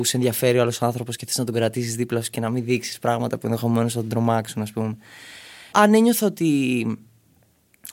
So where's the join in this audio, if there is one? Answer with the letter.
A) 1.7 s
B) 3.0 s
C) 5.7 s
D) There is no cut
C